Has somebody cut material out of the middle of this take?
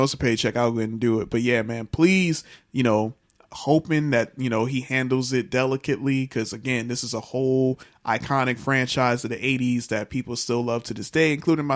no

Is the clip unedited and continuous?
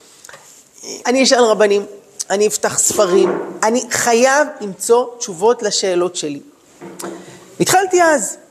no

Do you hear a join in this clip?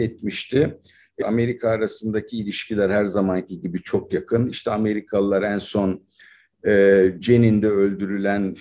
yes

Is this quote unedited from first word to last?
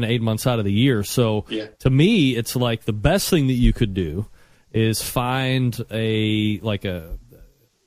yes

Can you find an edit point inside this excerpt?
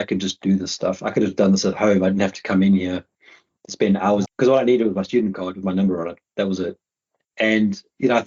yes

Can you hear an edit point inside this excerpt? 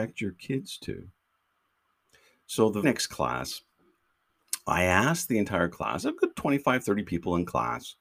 yes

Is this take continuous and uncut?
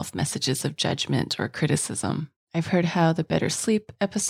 no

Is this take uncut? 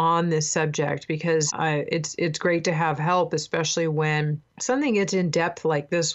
no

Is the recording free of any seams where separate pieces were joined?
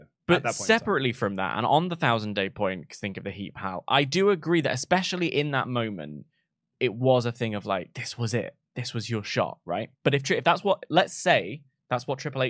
no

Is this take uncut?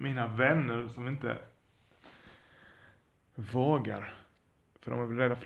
yes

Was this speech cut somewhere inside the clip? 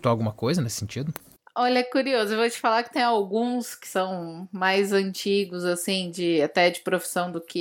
no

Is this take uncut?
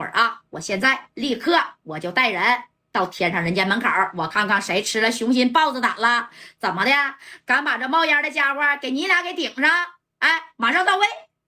yes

